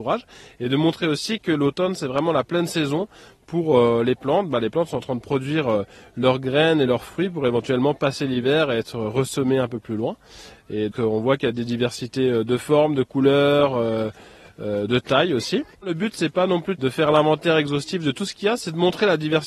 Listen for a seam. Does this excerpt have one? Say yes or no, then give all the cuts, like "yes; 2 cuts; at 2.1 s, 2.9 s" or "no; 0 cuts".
yes; 1 cut; at 10.9 s